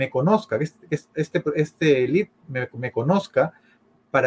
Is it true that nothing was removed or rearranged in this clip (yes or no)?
yes